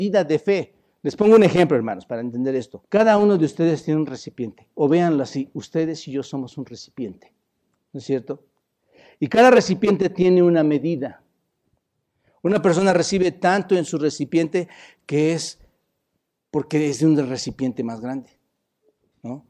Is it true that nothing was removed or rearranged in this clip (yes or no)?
no